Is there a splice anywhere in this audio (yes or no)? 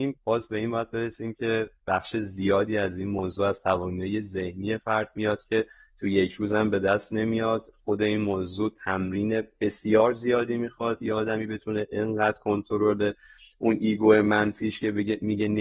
no